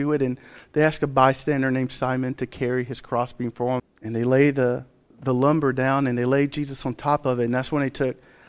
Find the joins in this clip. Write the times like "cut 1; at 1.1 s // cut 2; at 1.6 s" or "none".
cut 1; at 3.8 s